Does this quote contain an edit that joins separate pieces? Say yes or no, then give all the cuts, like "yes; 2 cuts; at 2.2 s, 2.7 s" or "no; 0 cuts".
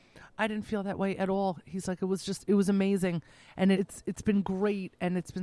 yes; 1 cut; at 3.7 s